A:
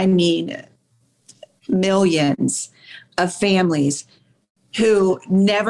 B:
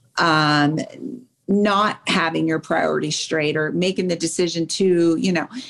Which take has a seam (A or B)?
B